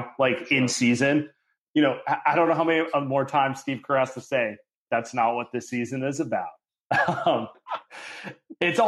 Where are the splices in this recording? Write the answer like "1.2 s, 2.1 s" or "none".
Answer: 1.6 s, 7.5 s